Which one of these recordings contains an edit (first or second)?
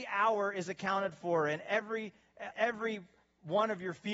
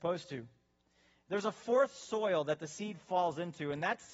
first